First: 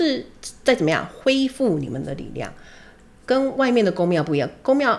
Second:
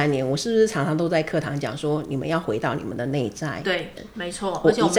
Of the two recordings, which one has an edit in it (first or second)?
second